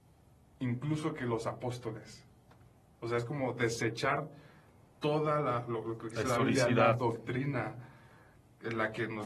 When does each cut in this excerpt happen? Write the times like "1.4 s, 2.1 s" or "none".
none